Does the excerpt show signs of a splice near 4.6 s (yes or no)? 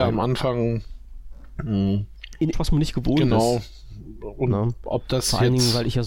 no